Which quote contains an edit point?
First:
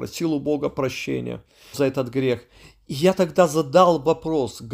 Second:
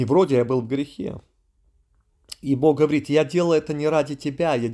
first; 1 cut; at 1.7 s

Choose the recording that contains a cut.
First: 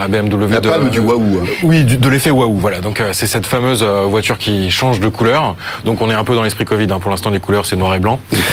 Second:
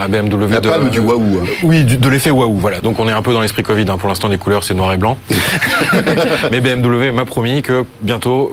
second; 1 cut; at 2.8 s

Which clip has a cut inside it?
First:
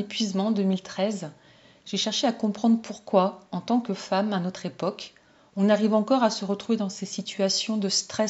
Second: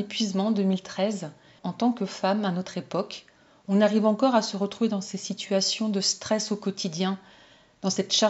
second; 1 cut; at 1.6 s

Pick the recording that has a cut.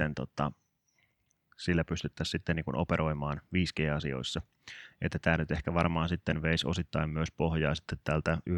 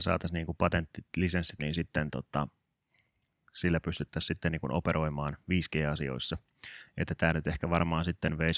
second; 1 cut; at 1.6 s

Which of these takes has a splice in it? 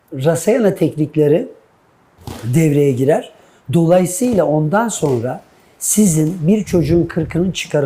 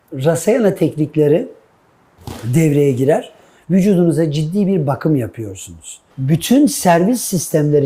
second; 2 cuts; at 3.6 s, 6.1 s

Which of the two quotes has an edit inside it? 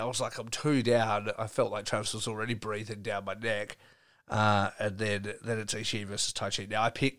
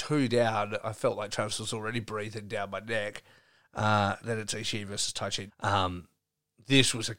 second; 2 cuts; at 4.2 s, 5.5 s

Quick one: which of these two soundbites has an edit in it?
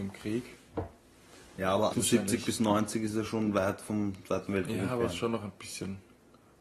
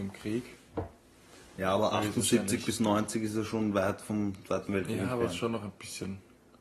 first; 1 cut; at 1.9 s

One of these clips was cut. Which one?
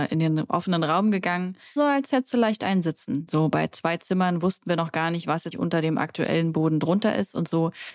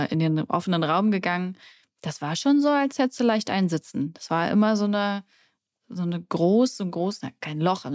first; 3 cuts; at 1.8 s, 3.3 s, 5.5 s

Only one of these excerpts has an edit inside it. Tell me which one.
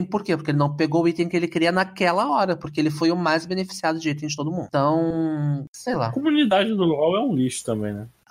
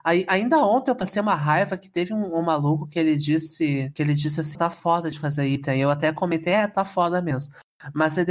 second; 1 cut; at 4.5 s

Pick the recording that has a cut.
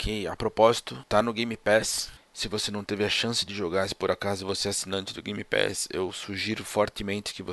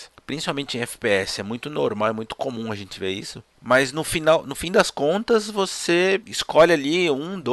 second; 1 cut; at 3.5 s

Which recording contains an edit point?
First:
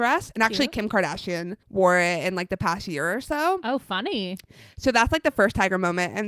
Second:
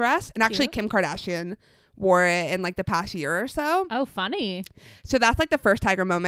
first; 1 cut; at 1.6 s

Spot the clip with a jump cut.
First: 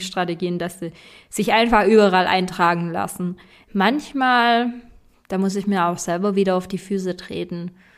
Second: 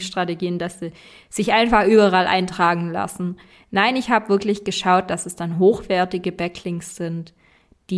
first; 1 cut; at 3.7 s

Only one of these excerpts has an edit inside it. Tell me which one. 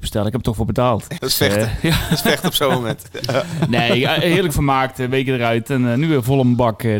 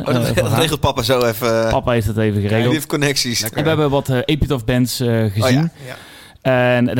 first; 1 cut; at 1.2 s

